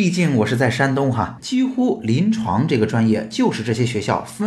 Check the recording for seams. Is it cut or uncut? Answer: cut